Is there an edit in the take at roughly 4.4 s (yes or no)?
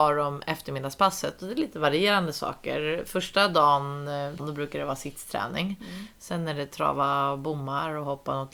yes